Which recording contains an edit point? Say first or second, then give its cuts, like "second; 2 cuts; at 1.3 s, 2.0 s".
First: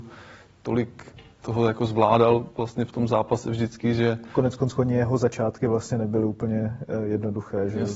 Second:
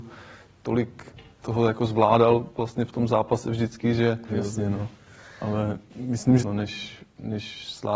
second; 2 cuts; at 4.3 s, 6.4 s